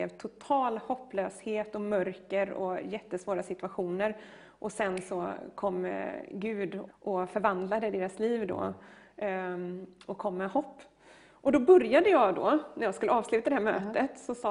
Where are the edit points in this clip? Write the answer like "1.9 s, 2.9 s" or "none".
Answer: 6.9 s